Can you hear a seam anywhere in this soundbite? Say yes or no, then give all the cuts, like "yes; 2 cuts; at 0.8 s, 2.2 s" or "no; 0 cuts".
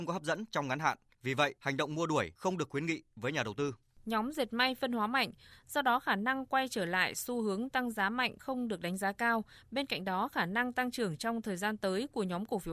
yes; 1 cut; at 5.5 s